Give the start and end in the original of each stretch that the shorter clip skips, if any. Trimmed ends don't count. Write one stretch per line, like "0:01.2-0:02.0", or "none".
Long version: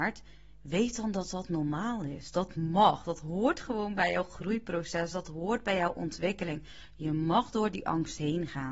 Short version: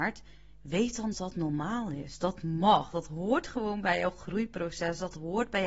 0:01.1-0:01.3